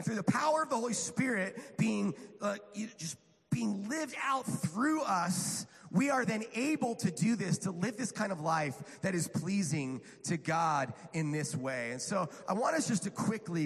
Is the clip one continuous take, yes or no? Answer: yes